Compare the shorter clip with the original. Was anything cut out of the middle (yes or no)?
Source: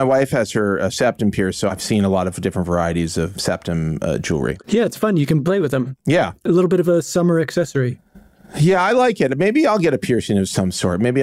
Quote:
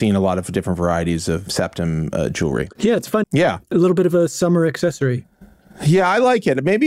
yes